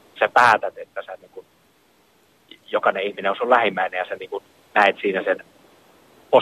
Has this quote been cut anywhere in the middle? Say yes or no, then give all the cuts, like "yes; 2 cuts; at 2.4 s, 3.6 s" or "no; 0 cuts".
no; 0 cuts